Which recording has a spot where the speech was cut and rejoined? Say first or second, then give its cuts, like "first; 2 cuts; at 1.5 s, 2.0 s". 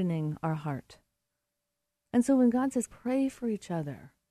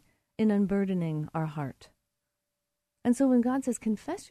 first; 1 cut; at 2.9 s